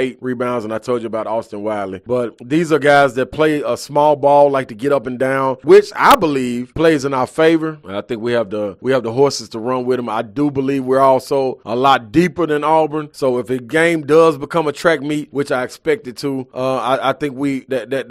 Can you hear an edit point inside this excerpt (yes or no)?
no